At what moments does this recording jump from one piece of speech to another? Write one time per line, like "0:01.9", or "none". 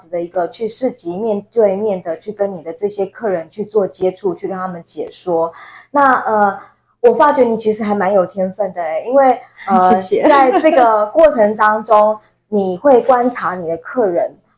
none